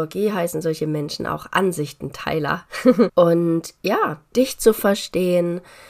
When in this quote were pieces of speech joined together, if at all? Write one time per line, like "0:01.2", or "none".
0:03.1
0:04.3